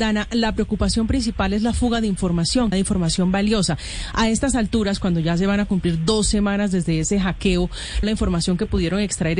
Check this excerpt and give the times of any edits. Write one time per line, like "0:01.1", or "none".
0:02.7
0:08.0